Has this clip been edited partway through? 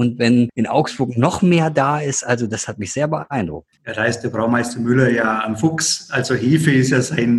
yes; 1 cut; at 3.8 s

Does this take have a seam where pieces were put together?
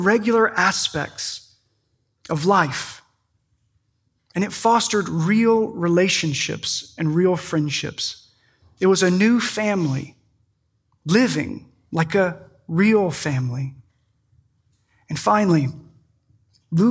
no; 0 cuts

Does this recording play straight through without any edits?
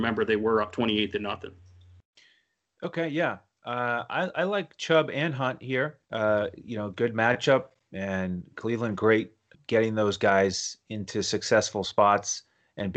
no; 2 cuts; at 6.0 s, 9.5 s

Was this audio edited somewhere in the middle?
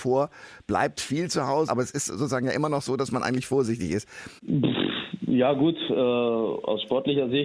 yes; 2 cuts; at 1.7 s, 4.4 s

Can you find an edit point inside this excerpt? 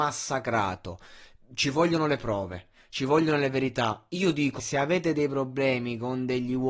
yes; 1 cut; at 4.6 s

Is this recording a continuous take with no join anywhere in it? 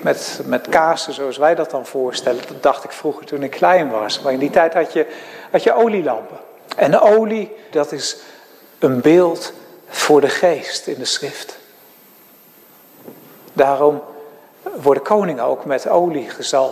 no; 1 cut; at 7.7 s

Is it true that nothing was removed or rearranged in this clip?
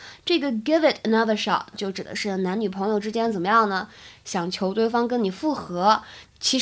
no; 1 cut; at 1.7 s

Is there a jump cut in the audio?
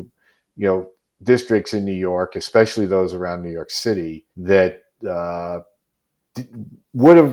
yes; 1 cut; at 4.3 s

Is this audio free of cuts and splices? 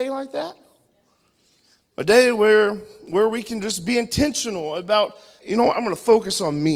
no; 1 cut; at 5.4 s

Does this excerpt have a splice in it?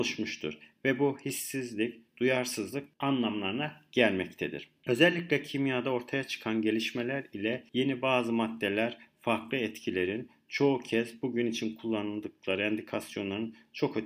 no; 0 cuts

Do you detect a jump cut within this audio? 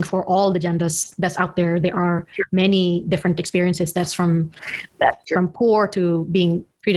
no; 0 cuts

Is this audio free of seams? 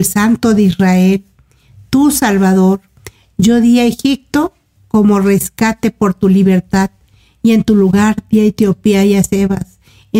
yes; 0 cuts

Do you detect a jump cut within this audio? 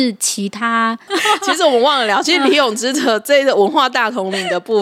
yes; 1 cut; at 1.1 s

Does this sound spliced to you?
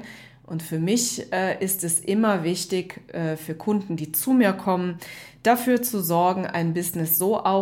no; 0 cuts

